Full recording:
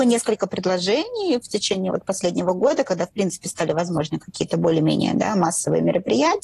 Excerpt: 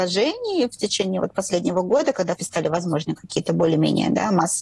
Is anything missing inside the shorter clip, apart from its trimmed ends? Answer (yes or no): yes